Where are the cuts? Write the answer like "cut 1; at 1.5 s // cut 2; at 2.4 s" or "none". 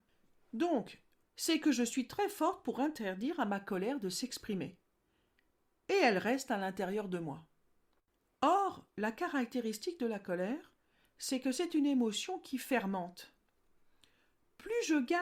cut 1; at 1.2 s